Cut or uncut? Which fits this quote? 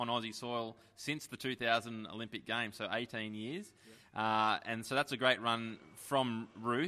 uncut